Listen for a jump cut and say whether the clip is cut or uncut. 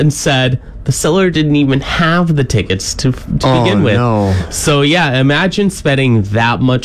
uncut